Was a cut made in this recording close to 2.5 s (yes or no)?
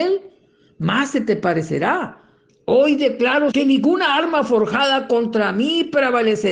yes